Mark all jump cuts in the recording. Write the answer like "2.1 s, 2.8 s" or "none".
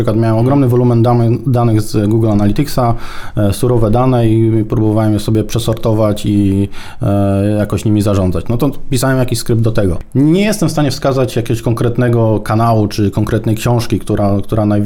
none